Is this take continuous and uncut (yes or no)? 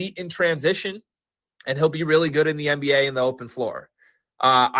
yes